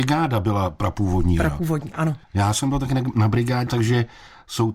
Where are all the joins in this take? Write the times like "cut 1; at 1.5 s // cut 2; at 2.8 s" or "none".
cut 1; at 2.2 s // cut 2; at 3.7 s

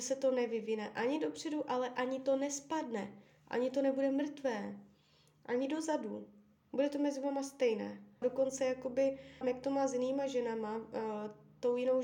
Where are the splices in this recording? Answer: cut 1; at 6.6 s // cut 2; at 8.2 s // cut 3; at 9.4 s

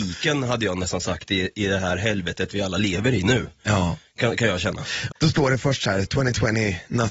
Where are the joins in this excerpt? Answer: cut 1; at 5.1 s

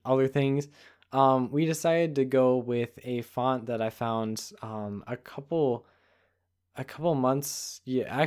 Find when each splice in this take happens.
none

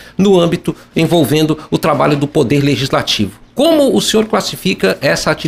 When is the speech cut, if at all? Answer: none

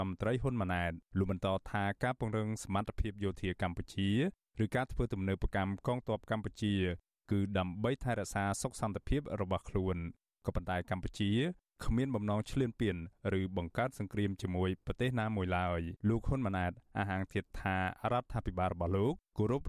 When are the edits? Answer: cut 1; at 1.1 s // cut 2; at 16.0 s

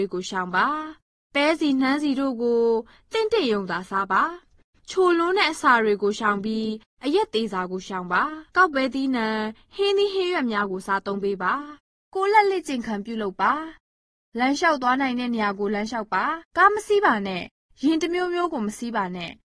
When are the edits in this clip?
cut 1; at 8.5 s // cut 2; at 16.5 s

